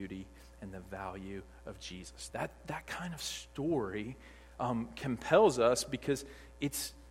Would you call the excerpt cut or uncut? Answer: cut